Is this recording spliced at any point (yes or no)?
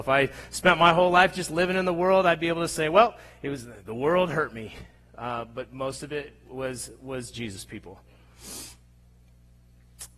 no